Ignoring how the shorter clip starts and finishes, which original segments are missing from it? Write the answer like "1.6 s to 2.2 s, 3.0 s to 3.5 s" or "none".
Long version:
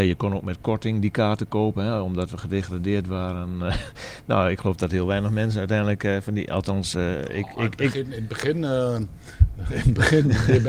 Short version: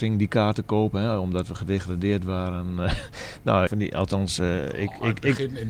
4.5 s to 6.2 s